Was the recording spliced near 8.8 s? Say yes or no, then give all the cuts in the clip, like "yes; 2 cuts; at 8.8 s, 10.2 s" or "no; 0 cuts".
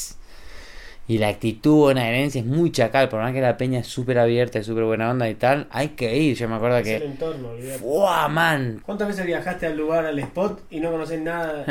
yes; 1 cut; at 8.8 s